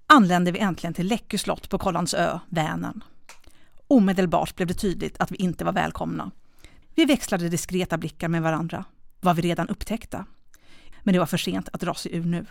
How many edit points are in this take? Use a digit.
2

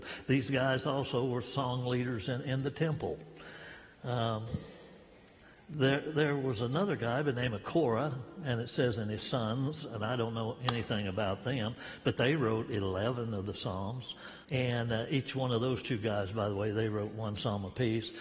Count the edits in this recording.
1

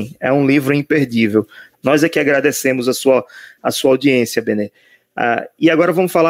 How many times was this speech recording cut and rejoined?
1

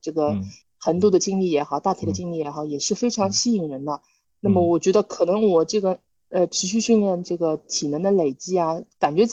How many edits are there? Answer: 0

